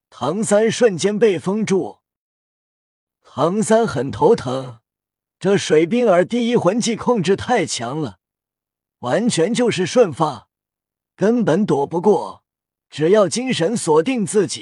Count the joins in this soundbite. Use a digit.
0